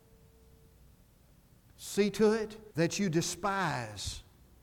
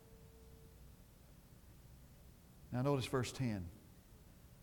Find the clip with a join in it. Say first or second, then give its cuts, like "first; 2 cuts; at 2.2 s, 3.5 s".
first; 2 cuts; at 1.6 s, 2.7 s